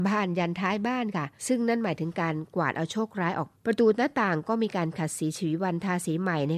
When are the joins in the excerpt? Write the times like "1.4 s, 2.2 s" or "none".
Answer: 1.4 s, 3.5 s